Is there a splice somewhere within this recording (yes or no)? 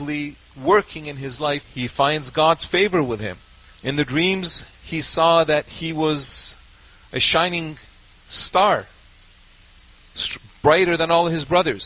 yes